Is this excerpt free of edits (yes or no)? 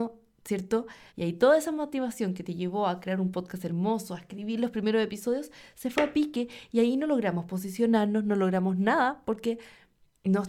no